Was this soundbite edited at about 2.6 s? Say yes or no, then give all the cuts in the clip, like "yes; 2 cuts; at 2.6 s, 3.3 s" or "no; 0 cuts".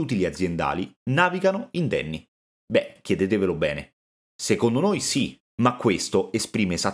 yes; 1 cut; at 2.6 s